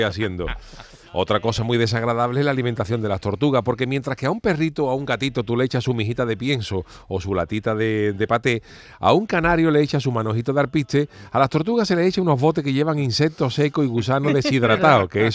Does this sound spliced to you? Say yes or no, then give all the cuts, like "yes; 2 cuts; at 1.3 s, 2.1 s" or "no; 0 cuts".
no; 0 cuts